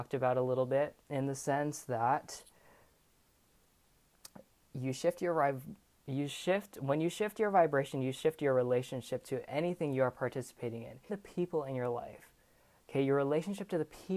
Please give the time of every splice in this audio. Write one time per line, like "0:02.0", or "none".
0:11.1